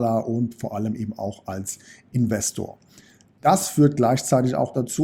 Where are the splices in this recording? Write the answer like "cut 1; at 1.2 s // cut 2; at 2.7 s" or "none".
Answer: none